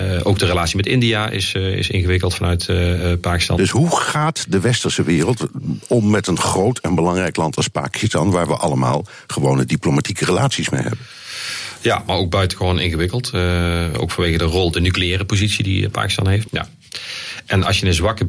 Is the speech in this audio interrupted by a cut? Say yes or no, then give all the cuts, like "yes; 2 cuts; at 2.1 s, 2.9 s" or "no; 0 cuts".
yes; 2 cuts; at 3.6 s, 16.4 s